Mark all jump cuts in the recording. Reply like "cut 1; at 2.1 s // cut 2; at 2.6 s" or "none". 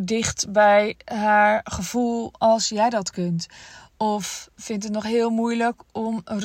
cut 1; at 4.6 s